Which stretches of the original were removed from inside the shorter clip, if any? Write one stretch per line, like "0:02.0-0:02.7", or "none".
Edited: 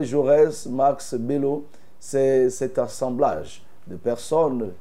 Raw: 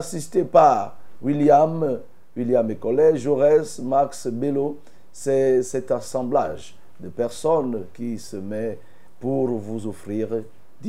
none